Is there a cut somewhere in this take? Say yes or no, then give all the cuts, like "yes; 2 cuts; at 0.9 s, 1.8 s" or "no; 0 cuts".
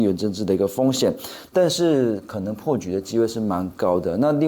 yes; 1 cut; at 1.5 s